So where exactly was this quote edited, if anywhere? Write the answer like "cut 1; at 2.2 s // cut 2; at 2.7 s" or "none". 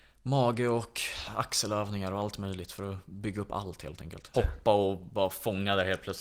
cut 1; at 4.3 s